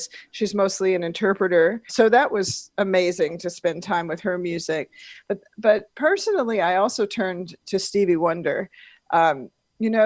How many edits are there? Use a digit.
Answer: 1